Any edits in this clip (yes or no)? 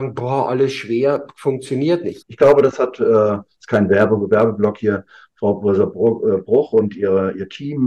yes